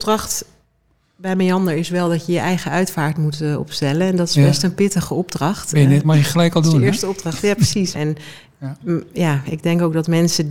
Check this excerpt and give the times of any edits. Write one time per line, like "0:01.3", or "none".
0:06.0
0:07.9